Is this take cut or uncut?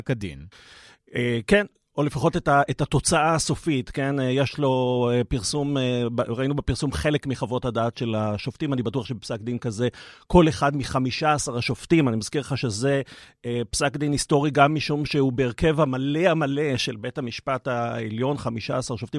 uncut